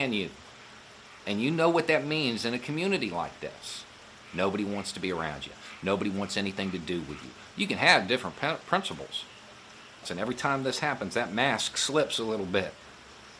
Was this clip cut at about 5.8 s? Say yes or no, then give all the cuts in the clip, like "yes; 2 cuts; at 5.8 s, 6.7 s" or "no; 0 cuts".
no; 2 cuts; at 7.5 s, 10.0 s